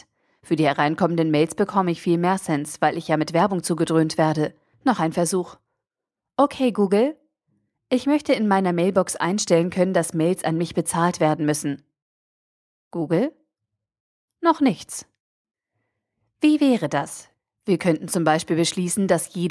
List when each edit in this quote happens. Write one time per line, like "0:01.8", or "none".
0:04.7